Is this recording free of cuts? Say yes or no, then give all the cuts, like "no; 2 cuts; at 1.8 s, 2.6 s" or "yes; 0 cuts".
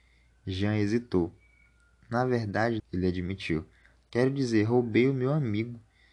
no; 1 cut; at 2.8 s